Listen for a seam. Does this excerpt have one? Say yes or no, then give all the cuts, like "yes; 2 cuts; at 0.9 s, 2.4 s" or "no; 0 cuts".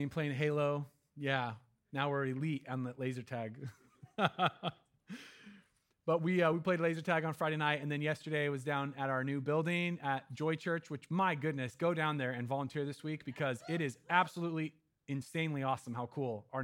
no; 0 cuts